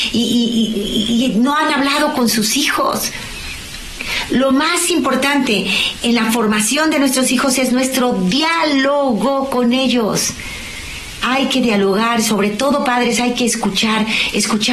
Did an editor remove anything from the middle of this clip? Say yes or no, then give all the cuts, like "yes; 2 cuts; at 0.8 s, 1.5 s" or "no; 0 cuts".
no; 0 cuts